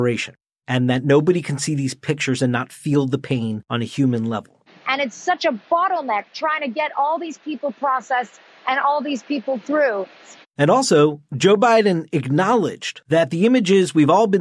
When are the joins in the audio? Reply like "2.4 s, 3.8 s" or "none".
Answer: 4.7 s, 10.4 s